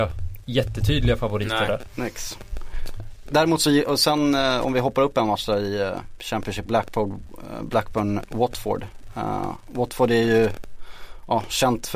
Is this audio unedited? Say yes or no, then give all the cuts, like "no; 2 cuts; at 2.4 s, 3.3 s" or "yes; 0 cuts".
yes; 0 cuts